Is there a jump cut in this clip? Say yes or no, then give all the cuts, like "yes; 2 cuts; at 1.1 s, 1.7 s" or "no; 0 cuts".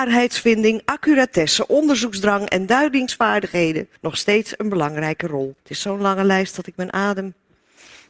yes; 2 cuts; at 4.0 s, 5.6 s